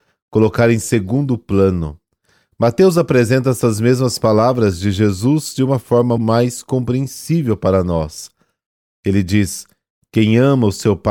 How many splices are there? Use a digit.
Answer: 1